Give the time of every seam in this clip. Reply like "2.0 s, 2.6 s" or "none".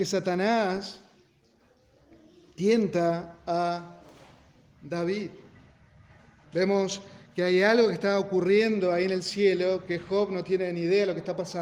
6.4 s